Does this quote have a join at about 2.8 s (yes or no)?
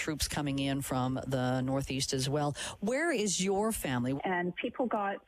no